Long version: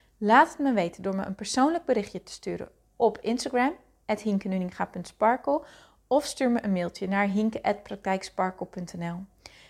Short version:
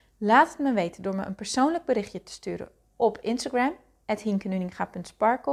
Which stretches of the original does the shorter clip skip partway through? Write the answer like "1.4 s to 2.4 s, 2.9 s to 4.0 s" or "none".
none